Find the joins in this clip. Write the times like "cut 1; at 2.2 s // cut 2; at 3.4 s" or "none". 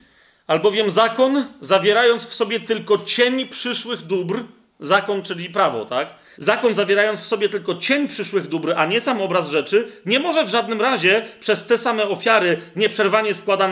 cut 1; at 6.3 s